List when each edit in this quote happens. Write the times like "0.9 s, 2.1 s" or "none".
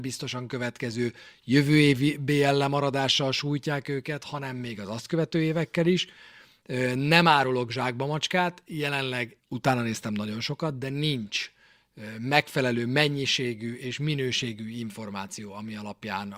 9.4 s